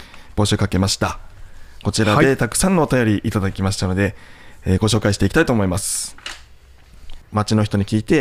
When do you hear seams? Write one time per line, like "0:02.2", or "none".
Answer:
0:07.2